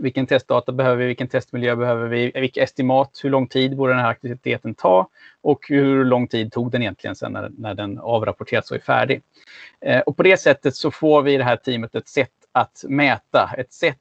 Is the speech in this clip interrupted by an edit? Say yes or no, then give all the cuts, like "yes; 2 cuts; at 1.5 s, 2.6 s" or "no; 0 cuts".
no; 0 cuts